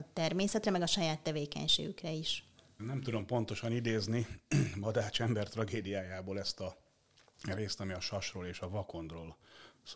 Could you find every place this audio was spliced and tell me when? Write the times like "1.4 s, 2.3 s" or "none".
2.8 s